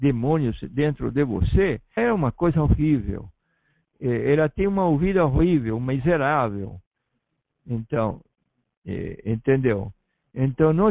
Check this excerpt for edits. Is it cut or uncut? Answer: cut